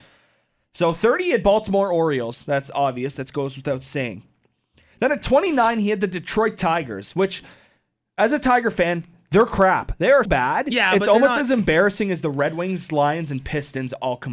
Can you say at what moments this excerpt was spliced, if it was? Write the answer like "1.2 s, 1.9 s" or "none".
10.3 s